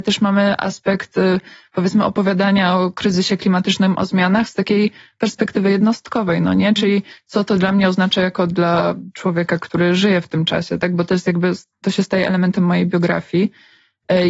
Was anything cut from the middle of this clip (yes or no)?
no